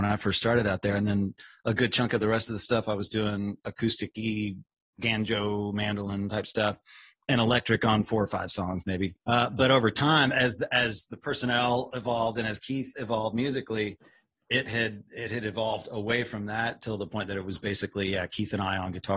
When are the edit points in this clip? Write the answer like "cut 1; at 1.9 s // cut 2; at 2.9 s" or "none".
cut 1; at 9.2 s